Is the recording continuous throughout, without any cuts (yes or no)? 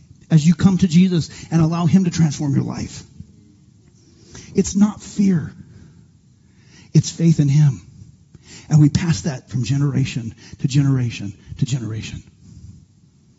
yes